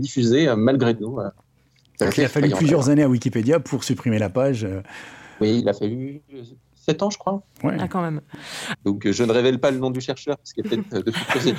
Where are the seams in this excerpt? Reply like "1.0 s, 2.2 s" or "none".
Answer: 8.7 s